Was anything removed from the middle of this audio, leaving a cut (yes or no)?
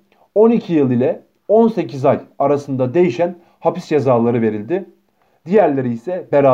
no